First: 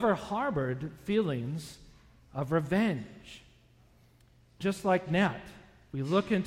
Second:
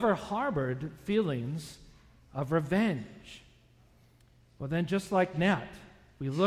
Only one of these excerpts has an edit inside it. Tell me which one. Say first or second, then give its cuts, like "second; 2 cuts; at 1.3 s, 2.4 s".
first; 1 cut; at 4.6 s